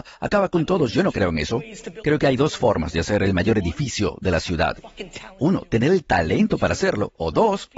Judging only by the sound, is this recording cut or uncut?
uncut